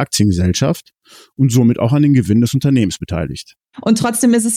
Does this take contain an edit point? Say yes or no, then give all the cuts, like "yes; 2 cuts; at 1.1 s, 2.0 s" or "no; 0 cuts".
no; 0 cuts